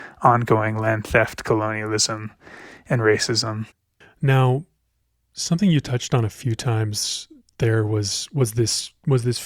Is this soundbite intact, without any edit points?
no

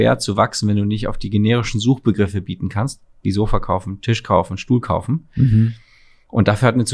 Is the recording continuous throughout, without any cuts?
yes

